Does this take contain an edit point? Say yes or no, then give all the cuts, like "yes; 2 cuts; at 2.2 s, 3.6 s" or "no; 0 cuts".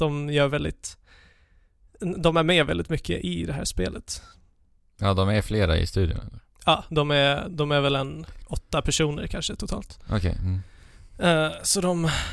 yes; 1 cut; at 7.5 s